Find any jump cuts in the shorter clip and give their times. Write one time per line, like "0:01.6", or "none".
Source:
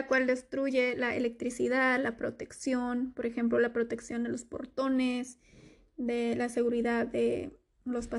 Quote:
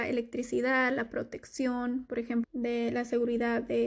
0:02.4